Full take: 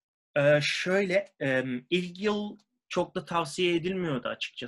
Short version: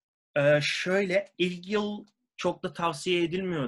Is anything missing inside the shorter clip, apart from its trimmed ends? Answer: yes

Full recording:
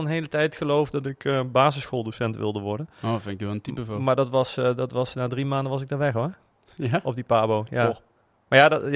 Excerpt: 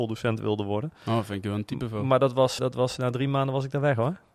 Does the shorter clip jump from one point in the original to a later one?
yes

